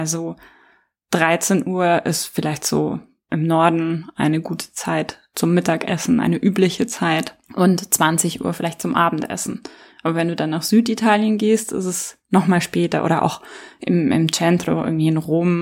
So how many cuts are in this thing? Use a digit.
1